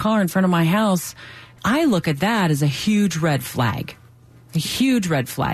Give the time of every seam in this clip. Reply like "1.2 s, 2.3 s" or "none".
1.6 s